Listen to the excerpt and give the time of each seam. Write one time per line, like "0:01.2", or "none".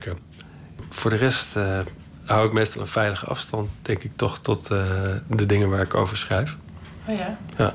none